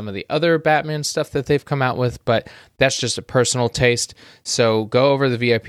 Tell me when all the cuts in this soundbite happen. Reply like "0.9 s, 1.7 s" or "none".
none